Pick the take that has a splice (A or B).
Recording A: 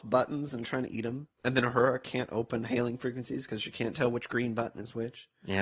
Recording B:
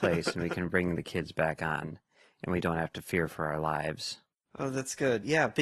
A